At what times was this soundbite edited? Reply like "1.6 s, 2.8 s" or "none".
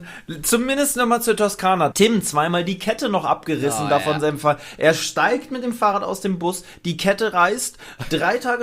1.9 s

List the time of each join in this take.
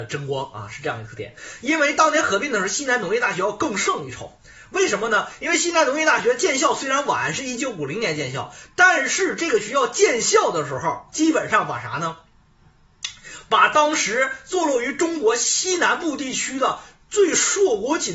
none

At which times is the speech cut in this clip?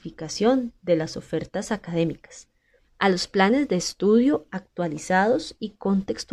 2.8 s

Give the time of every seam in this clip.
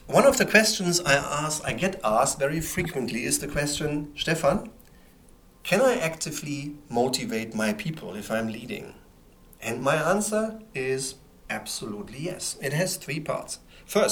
none

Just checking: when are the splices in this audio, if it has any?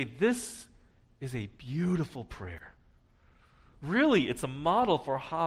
none

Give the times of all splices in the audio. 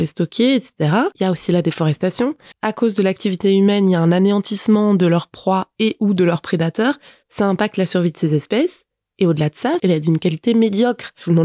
2.5 s, 9.8 s

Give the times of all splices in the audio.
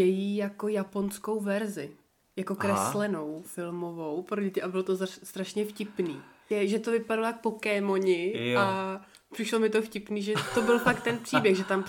none

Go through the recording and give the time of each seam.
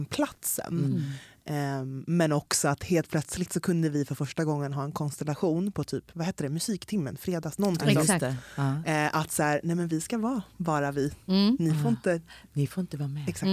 none

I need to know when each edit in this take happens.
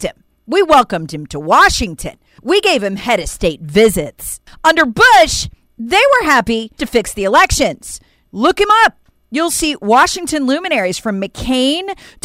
6.8 s, 8.3 s

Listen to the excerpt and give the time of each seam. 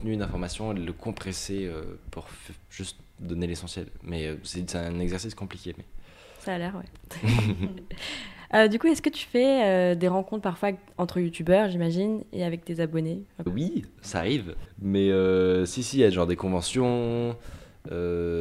13.5 s, 14.7 s

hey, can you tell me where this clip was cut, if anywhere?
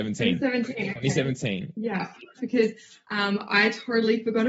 2.4 s

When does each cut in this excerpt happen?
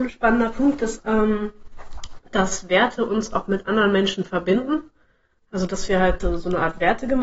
1.0 s

